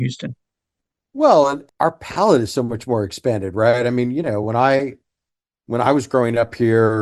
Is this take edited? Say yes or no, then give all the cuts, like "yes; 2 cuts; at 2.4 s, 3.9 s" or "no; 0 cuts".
no; 0 cuts